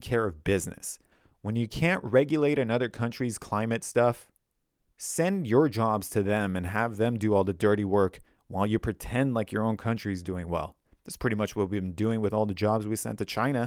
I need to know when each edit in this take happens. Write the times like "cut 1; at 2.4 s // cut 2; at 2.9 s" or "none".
none

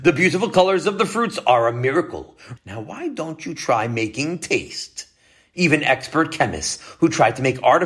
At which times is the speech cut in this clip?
cut 1; at 2.6 s // cut 2; at 5.5 s

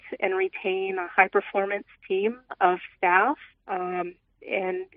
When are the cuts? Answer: cut 1; at 3.5 s

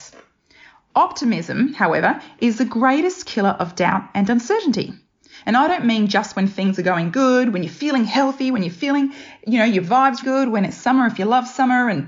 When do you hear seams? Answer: cut 1; at 5.4 s // cut 2; at 10.2 s

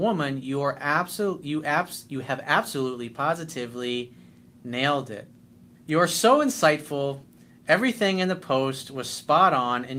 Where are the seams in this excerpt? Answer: cut 1; at 5.7 s

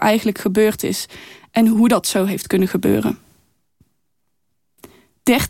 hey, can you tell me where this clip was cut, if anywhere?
none

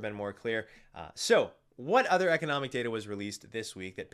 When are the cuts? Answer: none

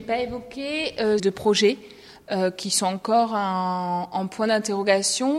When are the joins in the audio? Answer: cut 1; at 1.2 s

